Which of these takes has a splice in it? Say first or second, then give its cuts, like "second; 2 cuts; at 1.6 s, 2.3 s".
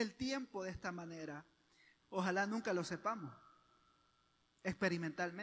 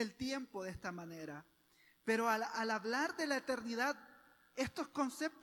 first; 1 cut; at 2.0 s